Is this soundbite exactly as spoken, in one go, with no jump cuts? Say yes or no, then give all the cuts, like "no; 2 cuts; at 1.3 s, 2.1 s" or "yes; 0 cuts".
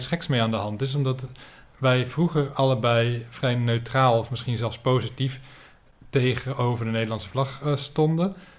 yes; 0 cuts